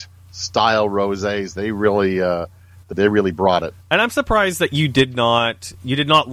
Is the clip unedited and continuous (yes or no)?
no